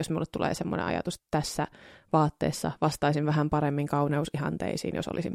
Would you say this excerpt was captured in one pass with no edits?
no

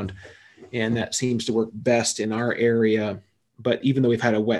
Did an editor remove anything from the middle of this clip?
no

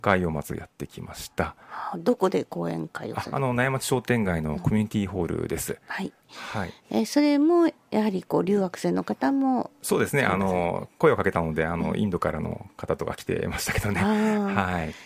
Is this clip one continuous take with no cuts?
yes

